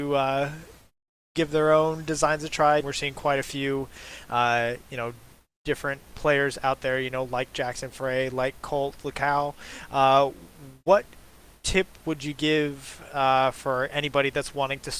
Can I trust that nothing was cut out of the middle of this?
no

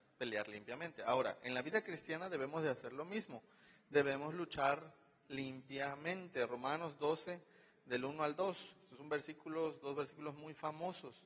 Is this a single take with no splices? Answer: yes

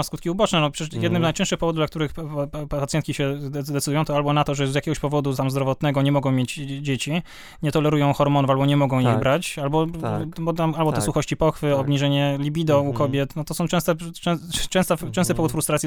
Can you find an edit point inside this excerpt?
no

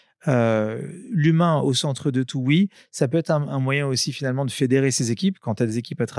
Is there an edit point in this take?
no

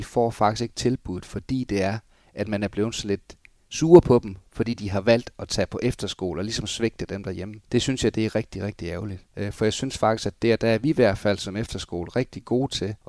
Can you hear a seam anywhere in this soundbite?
no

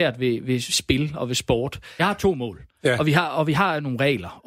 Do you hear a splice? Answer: yes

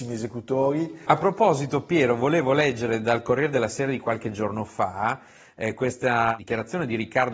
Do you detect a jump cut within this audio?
no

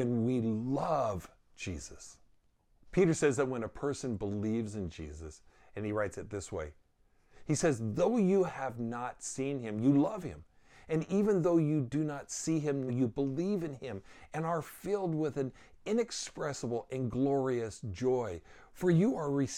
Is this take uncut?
no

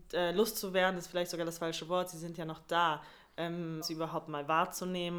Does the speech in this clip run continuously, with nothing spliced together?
no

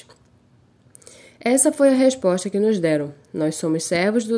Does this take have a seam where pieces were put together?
no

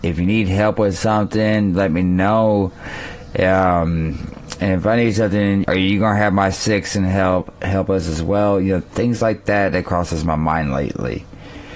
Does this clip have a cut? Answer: yes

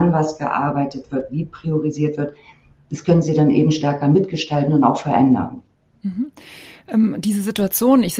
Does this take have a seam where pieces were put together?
no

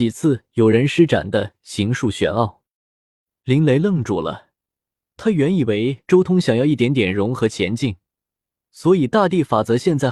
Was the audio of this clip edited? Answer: no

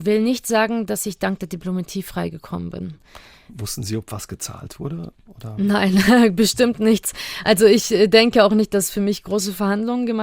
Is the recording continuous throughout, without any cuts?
yes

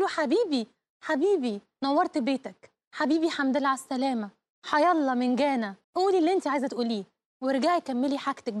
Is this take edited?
yes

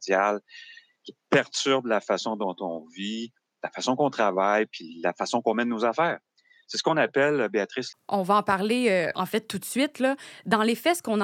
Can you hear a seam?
yes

